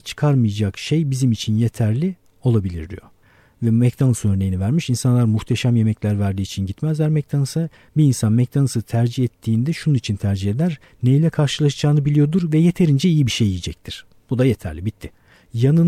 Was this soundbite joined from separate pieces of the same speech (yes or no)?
no